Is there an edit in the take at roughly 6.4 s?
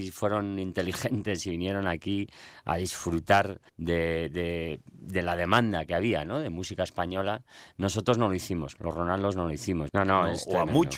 no; 2 cuts; at 3.7 s, 9.9 s

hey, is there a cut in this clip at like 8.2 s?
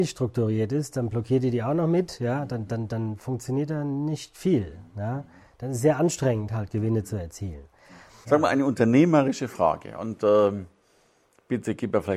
yes; 1 cut; at 8.2 s

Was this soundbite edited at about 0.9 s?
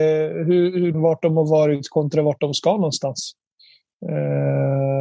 yes; 1 cut; at 0.9 s

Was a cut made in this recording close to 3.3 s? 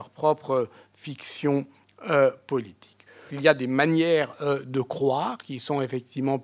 yes; 1 cut; at 3.3 s

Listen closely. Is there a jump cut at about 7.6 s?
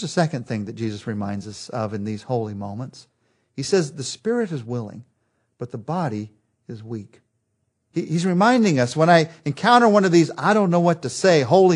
no; 0 cuts

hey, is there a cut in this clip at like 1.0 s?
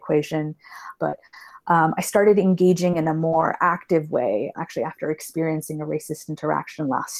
yes; 2 cuts; at 1.0 s, 4.6 s

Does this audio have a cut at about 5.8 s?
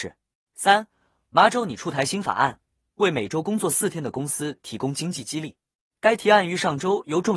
yes; 1 cut; at 5.8 s

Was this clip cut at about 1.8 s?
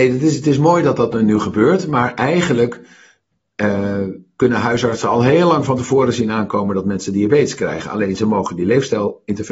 no; 0 cuts

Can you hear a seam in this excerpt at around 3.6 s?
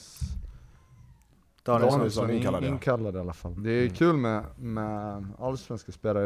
yes; 1 cut; at 3.6 s

